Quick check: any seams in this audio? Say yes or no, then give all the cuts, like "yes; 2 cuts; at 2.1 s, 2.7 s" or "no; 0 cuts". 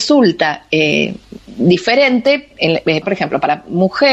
yes; 1 cut; at 3.0 s